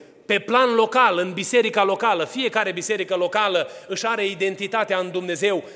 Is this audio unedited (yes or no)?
yes